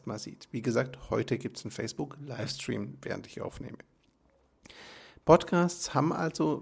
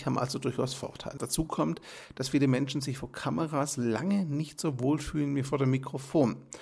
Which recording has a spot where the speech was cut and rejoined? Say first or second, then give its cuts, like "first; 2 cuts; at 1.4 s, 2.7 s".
second; 1 cut; at 1.2 s